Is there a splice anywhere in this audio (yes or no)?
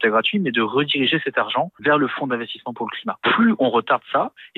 no